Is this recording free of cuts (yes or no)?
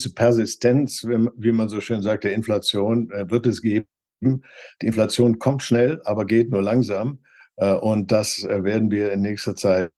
yes